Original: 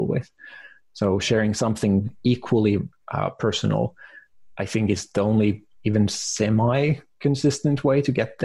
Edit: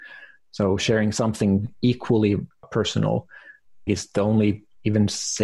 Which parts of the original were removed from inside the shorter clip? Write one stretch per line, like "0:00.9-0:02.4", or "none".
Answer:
0:03.1-0:03.3
0:04.5-0:04.9